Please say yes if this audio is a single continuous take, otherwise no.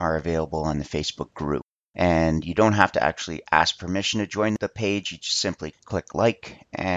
yes